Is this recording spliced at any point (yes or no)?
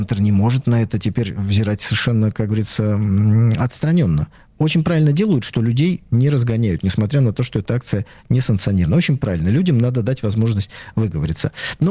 no